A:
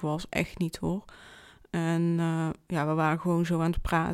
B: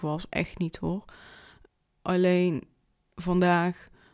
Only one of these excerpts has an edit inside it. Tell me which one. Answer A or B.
A